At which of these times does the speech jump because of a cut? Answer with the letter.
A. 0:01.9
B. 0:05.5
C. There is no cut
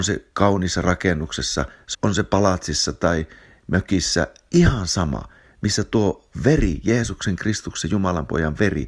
A